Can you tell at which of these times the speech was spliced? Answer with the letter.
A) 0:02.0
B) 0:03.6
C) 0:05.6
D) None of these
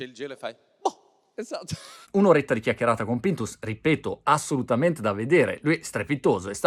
A